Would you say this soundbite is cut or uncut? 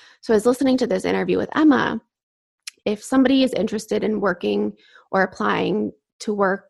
cut